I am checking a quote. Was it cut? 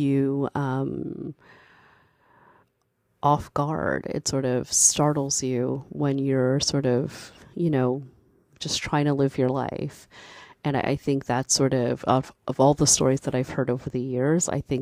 no; 0 cuts

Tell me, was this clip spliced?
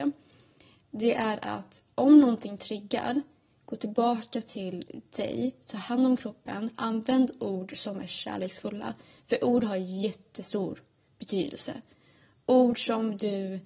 no; 0 cuts

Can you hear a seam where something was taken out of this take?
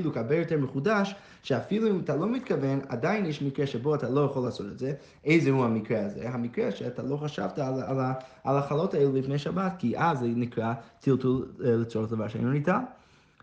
no; 0 cuts

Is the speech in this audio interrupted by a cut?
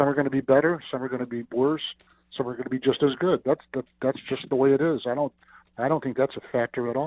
yes; 1 cut; at 3.4 s

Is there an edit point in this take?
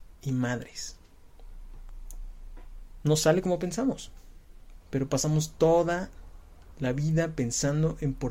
yes; 1 cut; at 4.8 s

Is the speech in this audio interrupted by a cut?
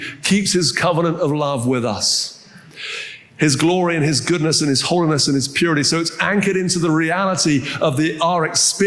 no; 0 cuts

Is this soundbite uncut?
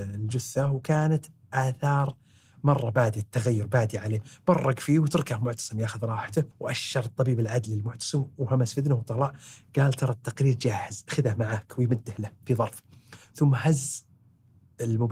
no; 1 cut; at 6.5 s

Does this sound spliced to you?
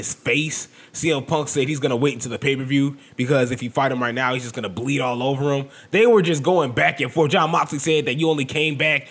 no; 0 cuts

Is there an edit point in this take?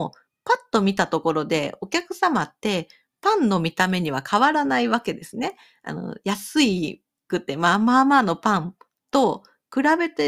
no; 0 cuts

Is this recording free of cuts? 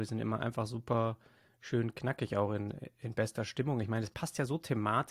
yes; 0 cuts

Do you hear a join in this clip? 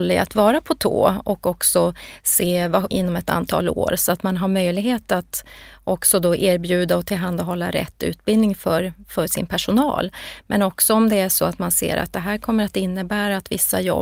yes; 1 cut; at 2.9 s

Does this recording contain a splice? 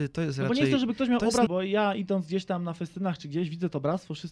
yes; 1 cut; at 1.5 s

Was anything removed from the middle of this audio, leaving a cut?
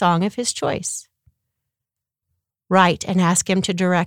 no; 0 cuts

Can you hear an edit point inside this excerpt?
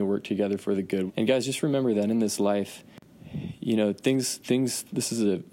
yes; 1 cut; at 1.1 s

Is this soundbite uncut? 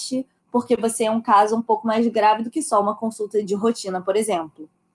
no; 1 cut; at 3.4 s

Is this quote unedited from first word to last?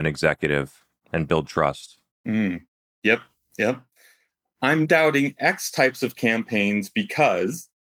no; 1 cut; at 4.8 s

